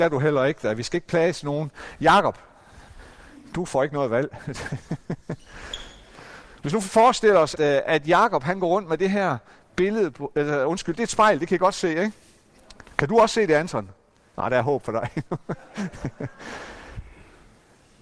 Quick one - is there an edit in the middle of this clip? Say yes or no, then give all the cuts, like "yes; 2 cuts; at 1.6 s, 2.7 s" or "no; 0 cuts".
yes; 1 cut; at 7.5 s